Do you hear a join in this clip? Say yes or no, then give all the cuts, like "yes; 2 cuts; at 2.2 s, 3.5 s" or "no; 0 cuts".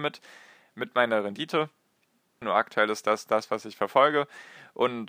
yes; 1 cut; at 2.4 s